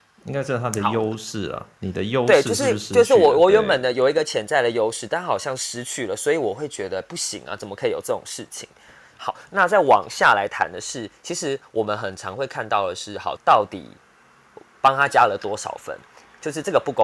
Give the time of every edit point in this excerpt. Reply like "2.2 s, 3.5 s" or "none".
9.5 s, 13.4 s

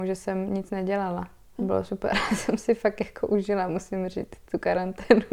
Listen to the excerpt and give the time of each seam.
1.6 s

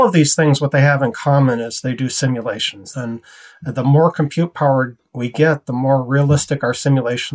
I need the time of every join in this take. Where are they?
2.9 s

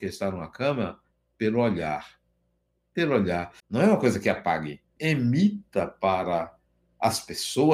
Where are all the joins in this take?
3.6 s, 5.0 s

